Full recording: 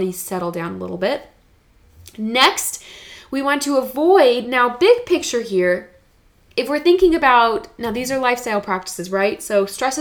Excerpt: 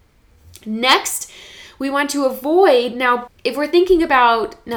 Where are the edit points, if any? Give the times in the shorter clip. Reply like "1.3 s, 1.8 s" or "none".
3.3 s